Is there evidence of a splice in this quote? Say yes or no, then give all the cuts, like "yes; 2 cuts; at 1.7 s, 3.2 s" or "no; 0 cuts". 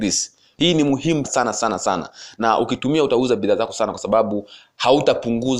yes; 1 cut; at 1.2 s